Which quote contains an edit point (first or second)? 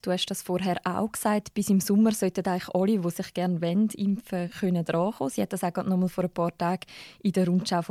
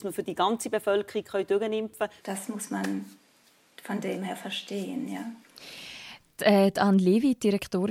second